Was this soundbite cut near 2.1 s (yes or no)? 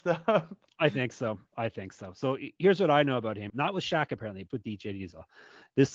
no